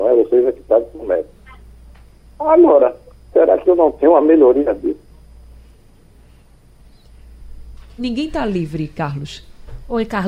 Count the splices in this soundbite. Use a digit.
2